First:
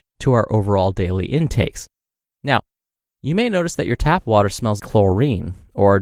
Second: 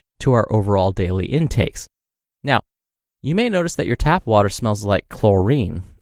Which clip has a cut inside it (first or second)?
first